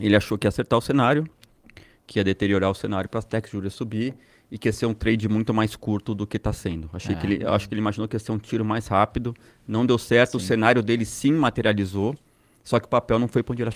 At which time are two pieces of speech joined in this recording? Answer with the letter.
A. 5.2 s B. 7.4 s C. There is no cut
C